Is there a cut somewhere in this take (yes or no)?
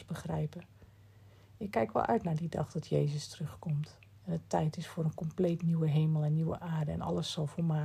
no